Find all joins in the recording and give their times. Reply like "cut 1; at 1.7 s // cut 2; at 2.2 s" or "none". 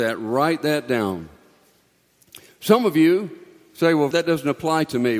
cut 1; at 4.1 s